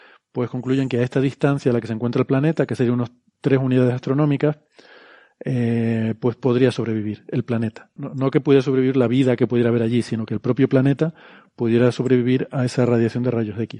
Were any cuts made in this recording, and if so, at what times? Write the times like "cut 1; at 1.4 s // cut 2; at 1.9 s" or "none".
cut 1; at 8.0 s